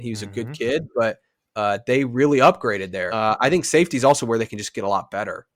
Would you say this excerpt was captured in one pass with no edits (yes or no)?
no